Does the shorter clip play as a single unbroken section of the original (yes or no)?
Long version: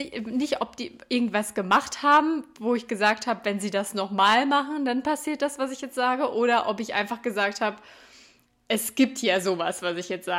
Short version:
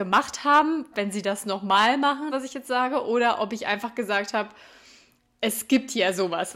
no